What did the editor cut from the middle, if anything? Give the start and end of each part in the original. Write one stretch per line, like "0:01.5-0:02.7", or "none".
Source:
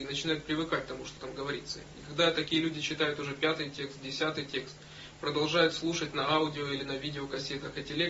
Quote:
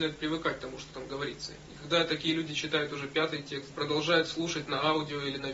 0:04.0-0:05.2